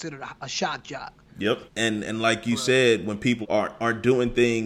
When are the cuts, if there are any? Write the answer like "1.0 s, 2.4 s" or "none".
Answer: 1.7 s, 3.4 s